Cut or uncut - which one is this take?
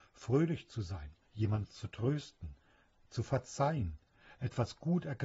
uncut